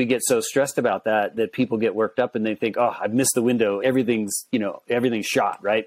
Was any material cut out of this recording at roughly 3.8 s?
yes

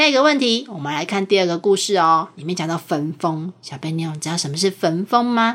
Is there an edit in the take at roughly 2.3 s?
no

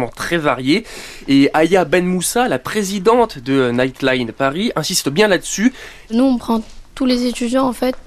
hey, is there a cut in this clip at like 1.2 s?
no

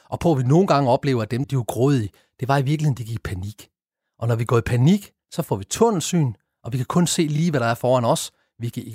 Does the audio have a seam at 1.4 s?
yes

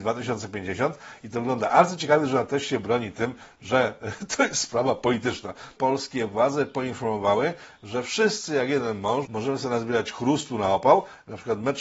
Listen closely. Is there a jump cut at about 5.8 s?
yes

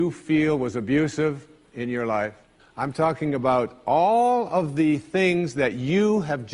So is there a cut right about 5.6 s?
no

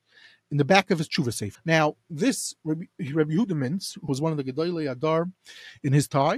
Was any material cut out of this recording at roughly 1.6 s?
yes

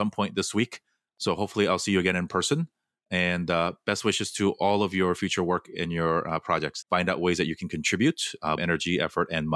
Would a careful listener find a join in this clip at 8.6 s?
yes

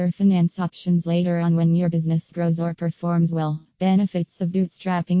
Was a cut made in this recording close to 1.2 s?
no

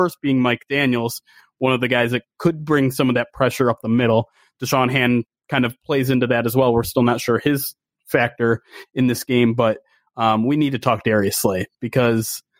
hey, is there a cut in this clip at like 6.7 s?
no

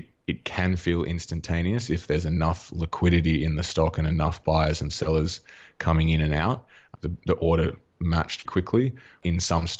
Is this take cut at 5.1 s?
no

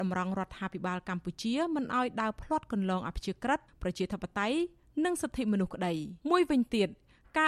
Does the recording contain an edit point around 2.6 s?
no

